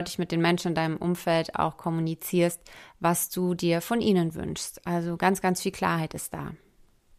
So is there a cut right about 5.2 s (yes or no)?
no